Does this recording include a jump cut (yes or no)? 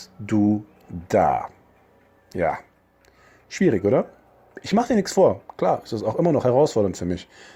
no